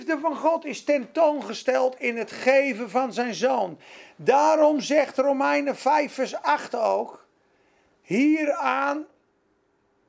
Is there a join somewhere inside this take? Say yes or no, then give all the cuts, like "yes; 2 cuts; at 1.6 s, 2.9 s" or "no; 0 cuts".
no; 0 cuts